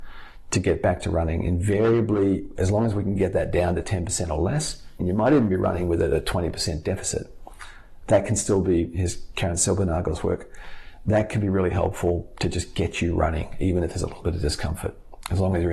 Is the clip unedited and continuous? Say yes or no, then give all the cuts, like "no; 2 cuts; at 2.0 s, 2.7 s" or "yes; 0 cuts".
no; 1 cut; at 5.0 s